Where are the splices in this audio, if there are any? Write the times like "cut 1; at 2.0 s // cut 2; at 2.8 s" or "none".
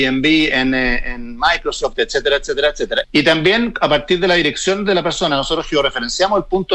cut 1; at 3.0 s